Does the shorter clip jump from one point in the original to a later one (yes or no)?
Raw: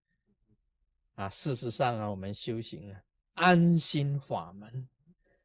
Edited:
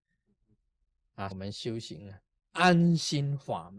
yes